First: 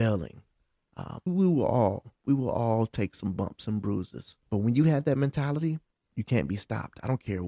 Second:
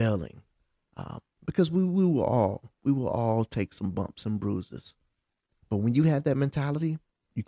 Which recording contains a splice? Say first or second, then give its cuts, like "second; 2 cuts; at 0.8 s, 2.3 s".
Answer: first; 2 cuts; at 1.3 s, 4.4 s